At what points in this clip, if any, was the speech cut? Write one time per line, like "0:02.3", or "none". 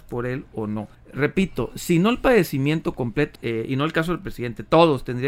0:00.9
0:03.4